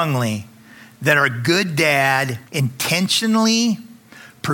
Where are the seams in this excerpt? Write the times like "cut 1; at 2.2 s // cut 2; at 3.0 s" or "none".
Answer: cut 1; at 2.5 s